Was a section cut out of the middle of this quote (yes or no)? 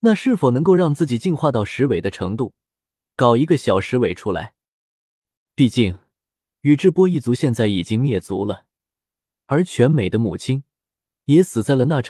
yes